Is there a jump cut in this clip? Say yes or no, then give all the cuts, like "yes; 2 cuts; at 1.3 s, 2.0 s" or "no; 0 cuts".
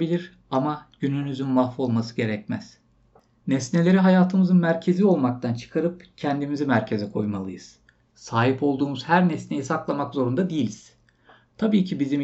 no; 0 cuts